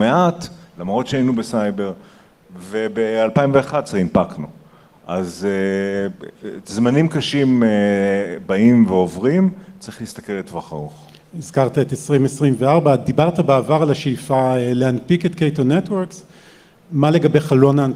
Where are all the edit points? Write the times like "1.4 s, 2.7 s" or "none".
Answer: none